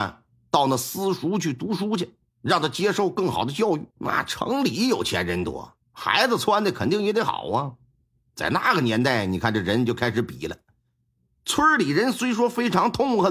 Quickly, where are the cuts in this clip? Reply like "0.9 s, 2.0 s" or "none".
3.9 s, 11.4 s